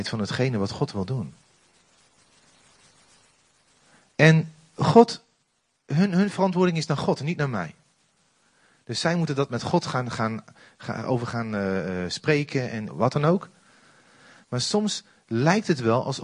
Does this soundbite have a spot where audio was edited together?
yes; 1 cut; at 12.9 s

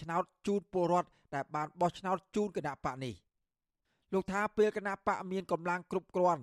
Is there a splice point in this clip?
no; 0 cuts

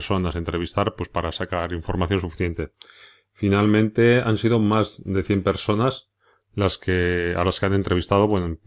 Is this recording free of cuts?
yes; 0 cuts

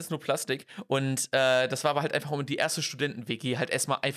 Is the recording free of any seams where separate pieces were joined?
yes; 0 cuts

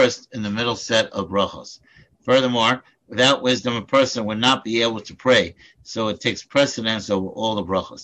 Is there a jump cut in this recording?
no; 0 cuts

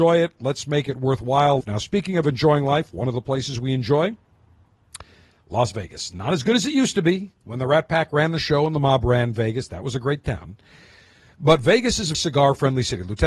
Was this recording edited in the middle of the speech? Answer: yes; 2 cuts; at 1.6 s, 12.1 s

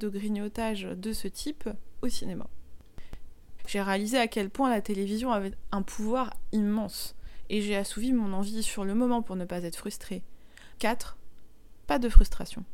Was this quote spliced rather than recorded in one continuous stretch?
yes; 3 cuts; at 3.6 s, 10.8 s, 11.8 s

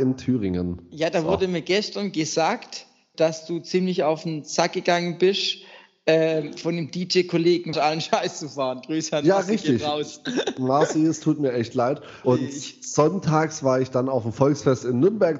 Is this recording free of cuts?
no; 3 cuts; at 3.1 s, 7.7 s, 12.2 s

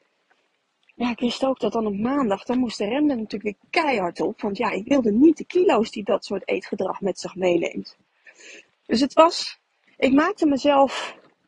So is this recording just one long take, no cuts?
yes; 0 cuts

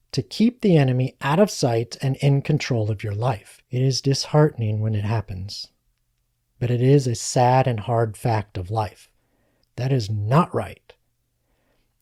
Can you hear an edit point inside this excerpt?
yes; 2 cuts; at 3.6 s, 9.6 s

